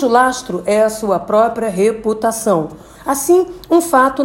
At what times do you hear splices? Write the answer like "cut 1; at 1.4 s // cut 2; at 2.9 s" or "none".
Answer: cut 1; at 2.9 s